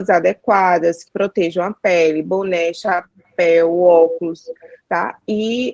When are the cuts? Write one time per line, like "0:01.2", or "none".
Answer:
0:01.1